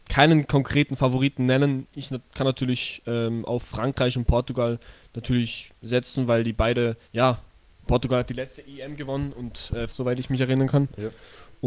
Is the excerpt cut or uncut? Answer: cut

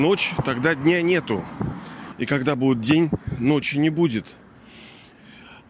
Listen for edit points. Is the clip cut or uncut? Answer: cut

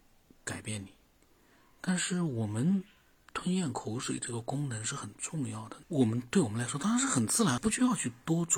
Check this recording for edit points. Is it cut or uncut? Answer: cut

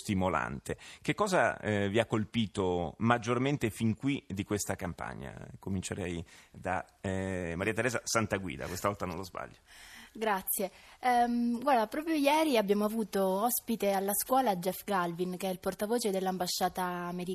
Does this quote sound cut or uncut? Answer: uncut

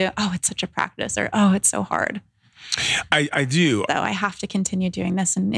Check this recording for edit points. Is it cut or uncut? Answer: cut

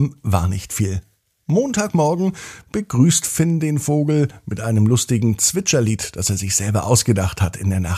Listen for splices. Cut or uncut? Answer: uncut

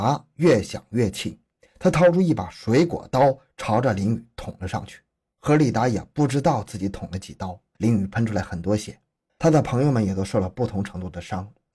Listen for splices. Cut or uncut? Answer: cut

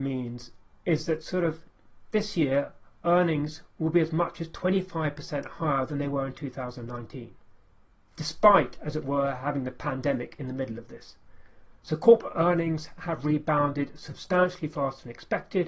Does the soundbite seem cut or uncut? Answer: uncut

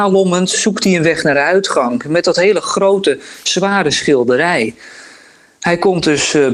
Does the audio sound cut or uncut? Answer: uncut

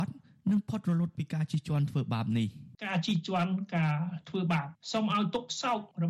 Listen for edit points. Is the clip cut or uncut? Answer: cut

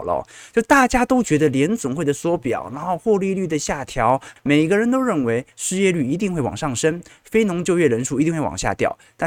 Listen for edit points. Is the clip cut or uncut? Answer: cut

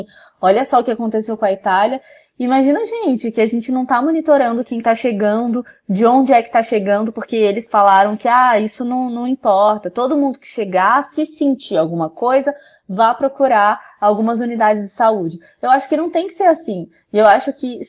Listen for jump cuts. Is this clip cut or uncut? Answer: uncut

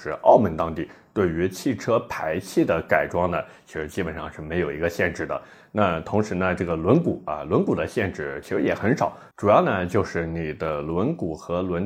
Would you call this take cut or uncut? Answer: uncut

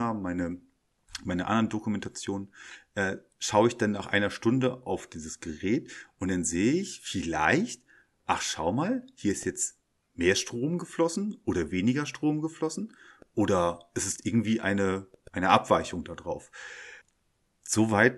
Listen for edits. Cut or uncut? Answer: cut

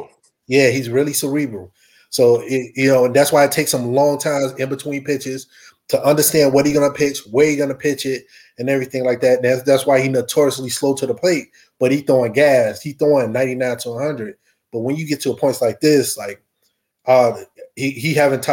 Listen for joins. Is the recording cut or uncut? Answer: uncut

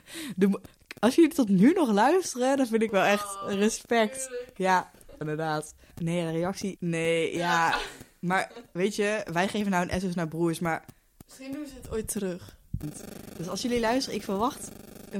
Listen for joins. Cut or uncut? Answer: cut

